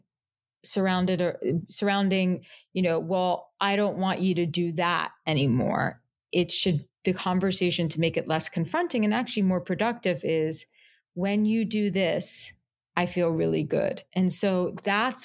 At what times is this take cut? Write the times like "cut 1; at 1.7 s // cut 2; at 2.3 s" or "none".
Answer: none